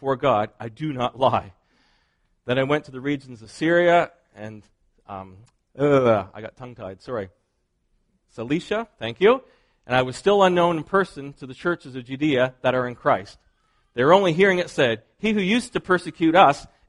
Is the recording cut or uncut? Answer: uncut